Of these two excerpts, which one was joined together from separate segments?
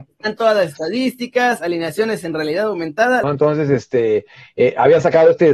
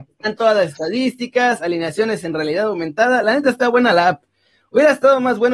first; 1 cut; at 3.2 s

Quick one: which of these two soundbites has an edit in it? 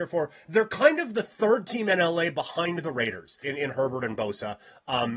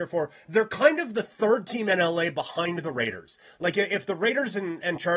first; 1 cut; at 3.4 s

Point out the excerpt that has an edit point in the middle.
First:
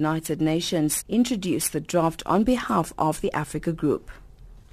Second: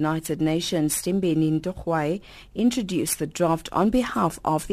first; 1 cut; at 1.0 s

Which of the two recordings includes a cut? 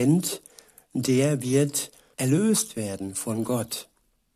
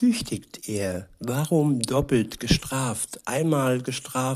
first; 1 cut; at 2.1 s

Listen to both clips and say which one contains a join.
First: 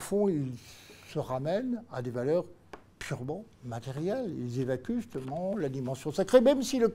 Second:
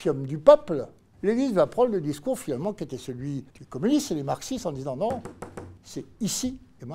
second; 3 cuts; at 1.1 s, 3.5 s, 5.8 s

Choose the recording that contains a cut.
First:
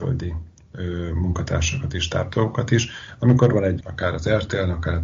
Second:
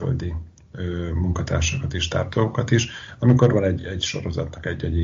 first; 1 cut; at 3.8 s

